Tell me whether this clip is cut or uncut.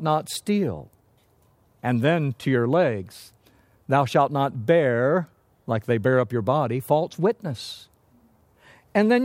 uncut